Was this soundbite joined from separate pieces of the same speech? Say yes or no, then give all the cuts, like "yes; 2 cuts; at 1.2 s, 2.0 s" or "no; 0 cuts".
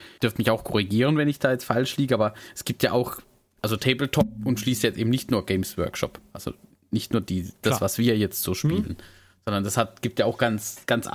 no; 0 cuts